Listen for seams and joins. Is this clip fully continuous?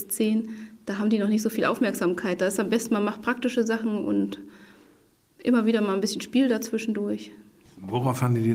yes; 0 cuts

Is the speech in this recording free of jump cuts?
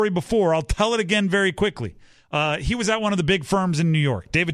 yes; 0 cuts

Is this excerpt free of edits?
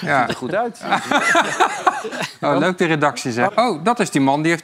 no; 1 cut; at 3.5 s

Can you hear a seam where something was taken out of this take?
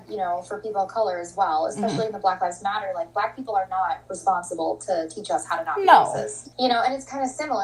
yes; 1 cut; at 6.5 s

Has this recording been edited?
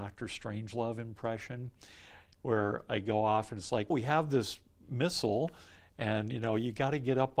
yes; 1 cut; at 3.9 s

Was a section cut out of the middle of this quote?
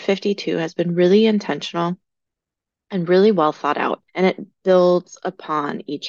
yes; 1 cut; at 4.1 s

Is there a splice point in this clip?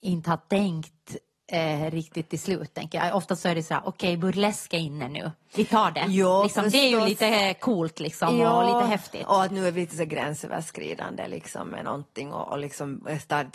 no; 0 cuts

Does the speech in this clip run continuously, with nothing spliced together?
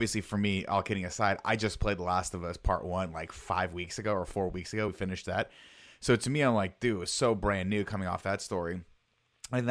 yes; 0 cuts

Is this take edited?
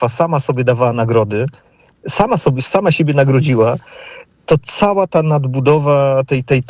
no; 0 cuts

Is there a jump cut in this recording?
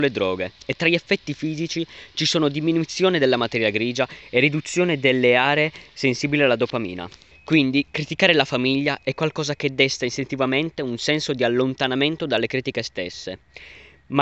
yes; 1 cut; at 7.3 s

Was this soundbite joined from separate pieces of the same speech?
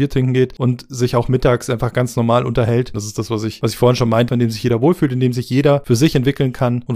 yes; 2 cuts; at 2.9 s, 4.3 s

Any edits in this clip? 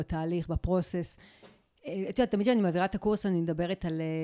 no; 0 cuts

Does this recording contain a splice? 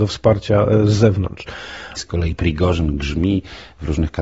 yes; 1 cut; at 2.0 s

